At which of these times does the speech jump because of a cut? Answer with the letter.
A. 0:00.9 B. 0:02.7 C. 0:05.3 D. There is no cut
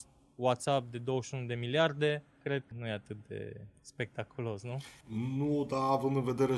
B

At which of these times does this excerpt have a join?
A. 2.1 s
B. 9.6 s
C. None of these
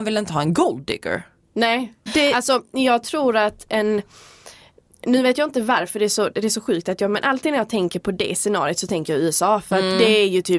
A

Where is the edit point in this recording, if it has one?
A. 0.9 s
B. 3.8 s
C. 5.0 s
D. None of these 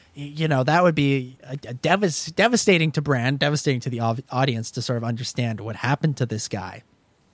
D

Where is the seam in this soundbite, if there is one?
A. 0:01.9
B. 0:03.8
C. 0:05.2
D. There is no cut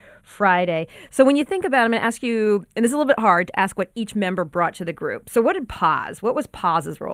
D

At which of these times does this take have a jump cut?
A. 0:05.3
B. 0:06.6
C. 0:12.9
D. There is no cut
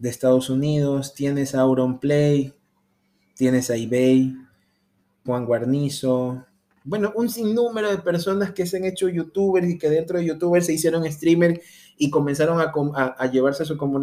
A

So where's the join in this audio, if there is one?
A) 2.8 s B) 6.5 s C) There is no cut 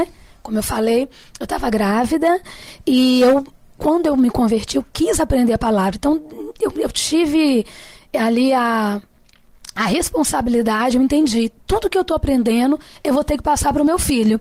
C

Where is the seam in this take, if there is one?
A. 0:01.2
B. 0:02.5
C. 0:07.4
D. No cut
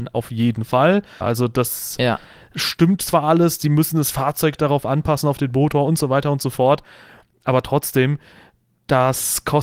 A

